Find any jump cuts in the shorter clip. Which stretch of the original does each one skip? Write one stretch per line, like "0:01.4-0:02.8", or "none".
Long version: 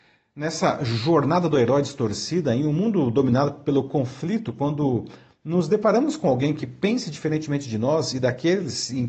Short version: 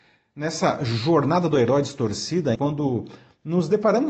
0:02.5-0:04.5